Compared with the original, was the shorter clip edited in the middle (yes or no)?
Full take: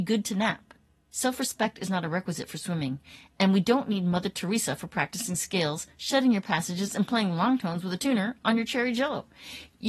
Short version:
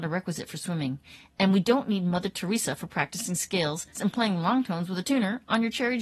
yes